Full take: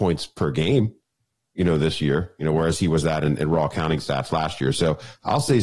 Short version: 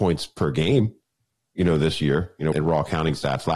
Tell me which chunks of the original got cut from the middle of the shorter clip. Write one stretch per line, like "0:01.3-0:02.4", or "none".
0:02.5-0:03.4

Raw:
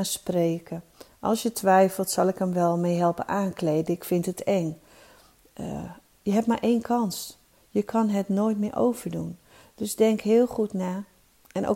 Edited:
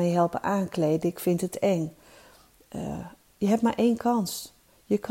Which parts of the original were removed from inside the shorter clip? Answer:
none

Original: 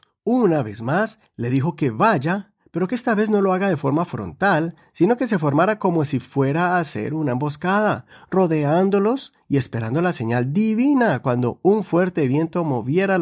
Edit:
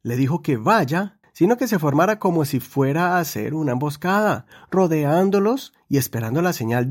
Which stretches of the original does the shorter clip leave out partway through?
0:02.6-0:04.8

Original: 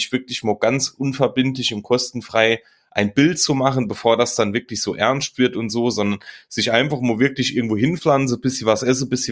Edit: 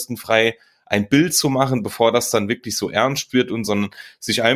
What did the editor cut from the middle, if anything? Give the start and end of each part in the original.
0:05.7-0:05.9

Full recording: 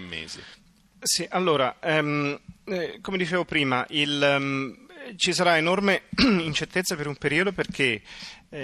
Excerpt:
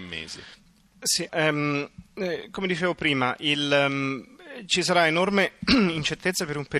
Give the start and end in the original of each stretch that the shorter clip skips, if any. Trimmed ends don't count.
0:01.3-0:01.8

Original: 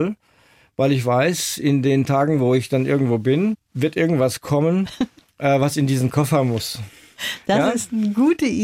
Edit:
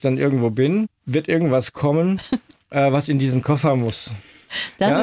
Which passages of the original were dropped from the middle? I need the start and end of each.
none

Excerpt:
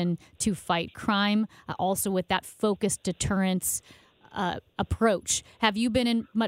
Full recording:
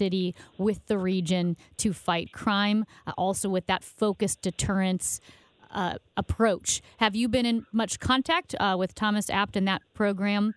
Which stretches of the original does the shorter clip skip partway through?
none

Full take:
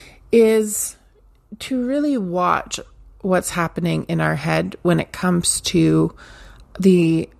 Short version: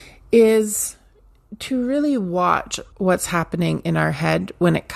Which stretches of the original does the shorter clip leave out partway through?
0:02.9-0:03.2

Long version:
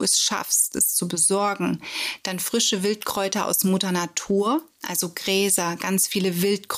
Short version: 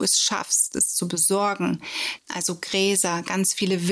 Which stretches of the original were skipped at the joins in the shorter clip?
0:02.2-0:04.7

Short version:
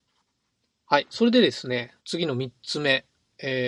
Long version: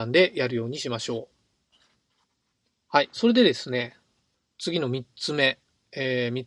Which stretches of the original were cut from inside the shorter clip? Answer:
0:04.0-0:04.5

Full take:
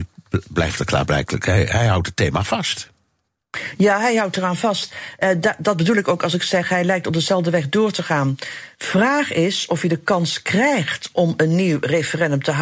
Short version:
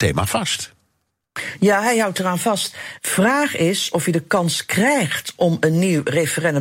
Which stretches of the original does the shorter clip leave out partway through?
0:05.2-0:08.7

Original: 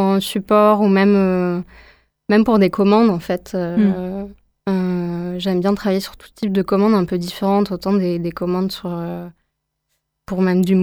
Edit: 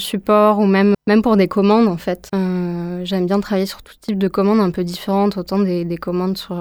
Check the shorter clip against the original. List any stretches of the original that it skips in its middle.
0:01.2-0:02.2
0:03.5-0:04.6

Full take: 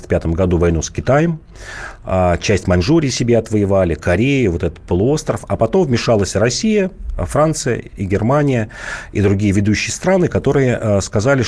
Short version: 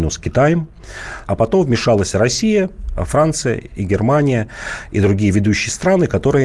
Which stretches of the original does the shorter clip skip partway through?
0:02.0-0:05.5

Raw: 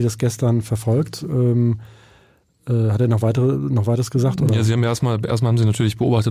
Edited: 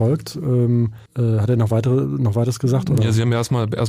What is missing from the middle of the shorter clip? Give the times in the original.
0:01.9-0:02.6

